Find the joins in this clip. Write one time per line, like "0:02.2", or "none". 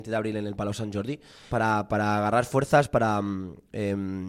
0:01.5